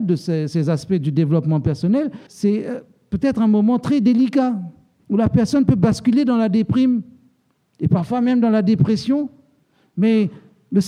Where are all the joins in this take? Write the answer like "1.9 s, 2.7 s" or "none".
2.3 s, 5.0 s

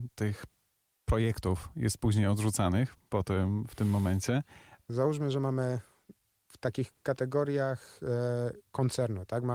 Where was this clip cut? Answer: 4.9 s

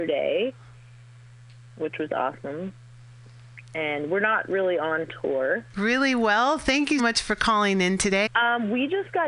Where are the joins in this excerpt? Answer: 5.7 s, 7.0 s, 8.3 s

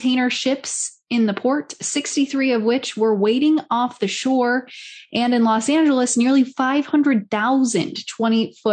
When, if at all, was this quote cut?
none

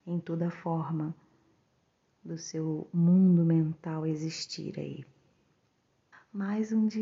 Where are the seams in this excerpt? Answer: 6.1 s

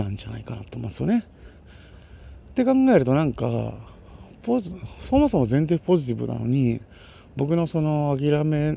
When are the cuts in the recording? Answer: none

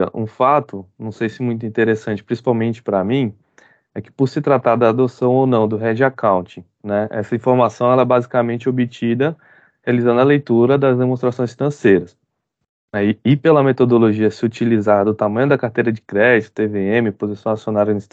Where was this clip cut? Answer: none

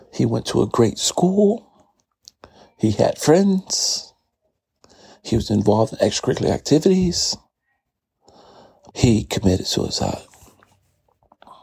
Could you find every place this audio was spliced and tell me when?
8.9 s

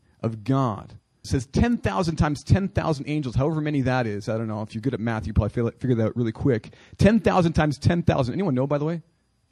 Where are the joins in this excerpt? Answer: 1.2 s

